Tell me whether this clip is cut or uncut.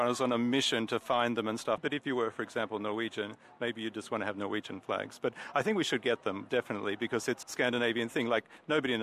cut